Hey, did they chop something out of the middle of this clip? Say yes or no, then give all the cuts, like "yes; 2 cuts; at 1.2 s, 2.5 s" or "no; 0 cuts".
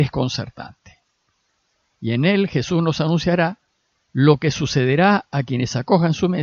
no; 0 cuts